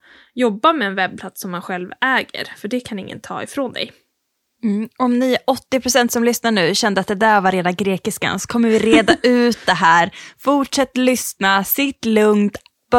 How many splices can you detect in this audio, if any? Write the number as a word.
zero